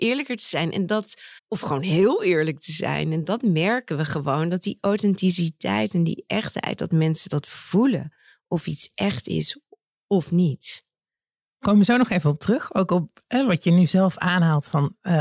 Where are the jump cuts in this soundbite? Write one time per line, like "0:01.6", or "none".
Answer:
0:01.4